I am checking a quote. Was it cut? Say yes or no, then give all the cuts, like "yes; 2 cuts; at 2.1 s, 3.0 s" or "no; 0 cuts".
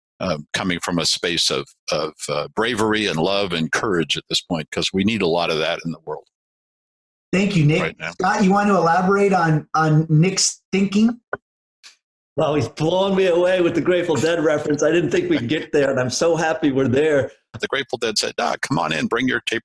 yes; 1 cut; at 17.6 s